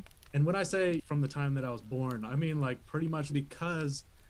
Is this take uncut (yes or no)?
no